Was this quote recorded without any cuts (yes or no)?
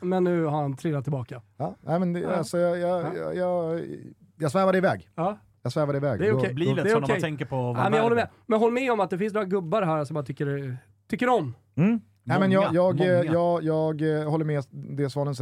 yes